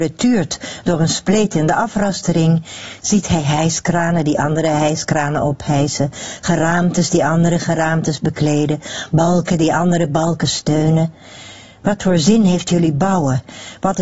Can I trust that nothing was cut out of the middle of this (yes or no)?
yes